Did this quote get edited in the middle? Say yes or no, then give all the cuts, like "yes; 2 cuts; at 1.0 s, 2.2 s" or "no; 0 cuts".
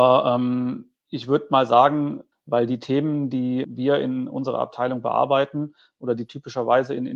yes; 2 cuts; at 2.3 s, 3.6 s